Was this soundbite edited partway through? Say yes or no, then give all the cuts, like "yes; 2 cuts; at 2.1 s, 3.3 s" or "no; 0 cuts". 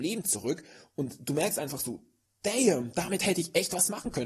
no; 0 cuts